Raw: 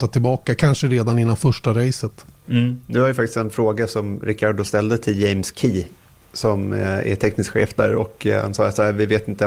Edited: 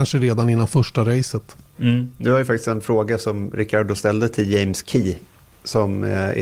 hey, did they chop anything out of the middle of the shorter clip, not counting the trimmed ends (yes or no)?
no